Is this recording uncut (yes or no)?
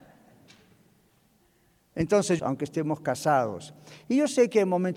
no